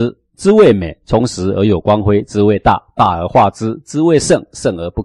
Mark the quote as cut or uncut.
uncut